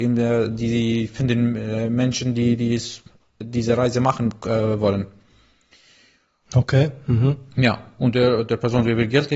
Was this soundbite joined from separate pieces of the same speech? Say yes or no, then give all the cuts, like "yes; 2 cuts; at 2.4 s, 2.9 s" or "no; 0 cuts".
no; 0 cuts